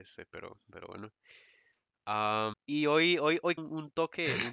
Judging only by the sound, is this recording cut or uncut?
cut